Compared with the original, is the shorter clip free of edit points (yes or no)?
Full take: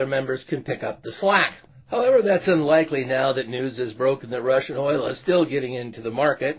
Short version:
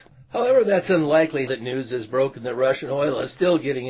no